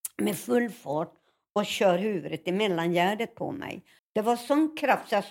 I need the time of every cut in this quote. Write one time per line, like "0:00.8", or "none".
0:04.0